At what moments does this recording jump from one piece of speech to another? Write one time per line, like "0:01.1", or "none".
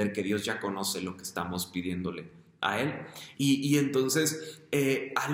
0:03.3